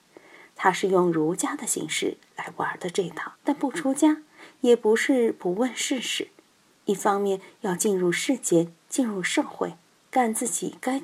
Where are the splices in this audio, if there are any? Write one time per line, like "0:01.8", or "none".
0:03.4

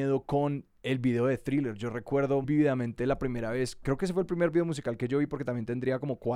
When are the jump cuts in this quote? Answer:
0:02.4

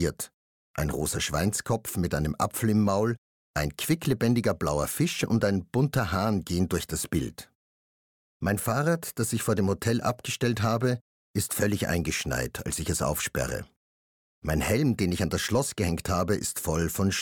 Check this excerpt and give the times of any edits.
none

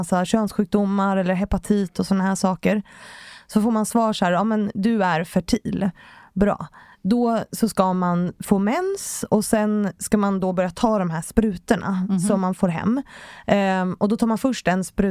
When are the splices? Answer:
none

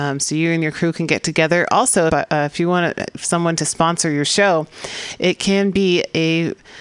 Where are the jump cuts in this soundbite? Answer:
0:02.1

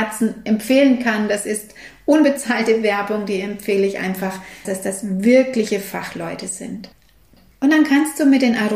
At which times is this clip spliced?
0:04.6

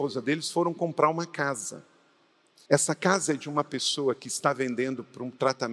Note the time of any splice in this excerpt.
0:02.7

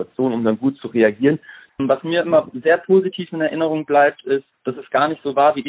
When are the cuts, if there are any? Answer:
0:01.7
0:04.5

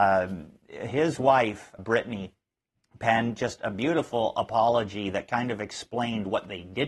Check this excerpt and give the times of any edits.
0:01.8

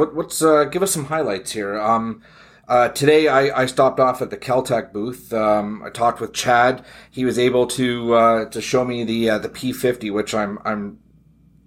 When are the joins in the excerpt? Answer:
none

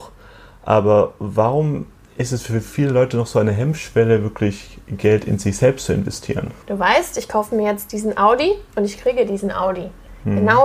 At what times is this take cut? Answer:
0:06.6

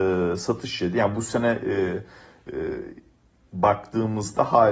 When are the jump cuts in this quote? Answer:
none

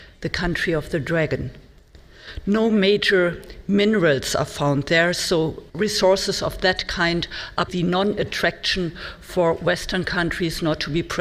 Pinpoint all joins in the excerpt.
0:02.4
0:05.7
0:07.7

